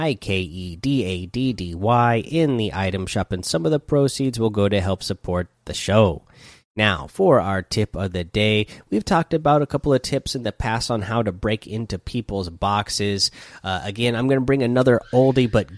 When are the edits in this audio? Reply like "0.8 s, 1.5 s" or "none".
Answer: none